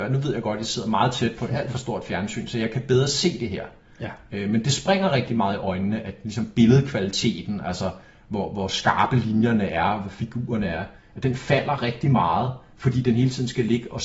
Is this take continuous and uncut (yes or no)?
yes